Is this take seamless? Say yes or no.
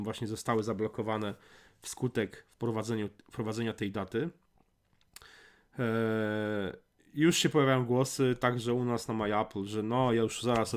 yes